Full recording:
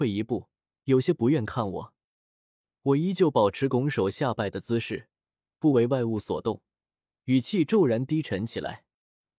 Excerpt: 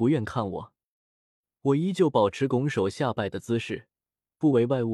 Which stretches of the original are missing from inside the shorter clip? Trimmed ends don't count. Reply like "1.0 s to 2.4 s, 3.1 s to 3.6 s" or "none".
none